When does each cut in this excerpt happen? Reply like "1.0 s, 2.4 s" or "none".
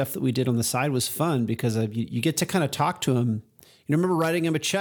none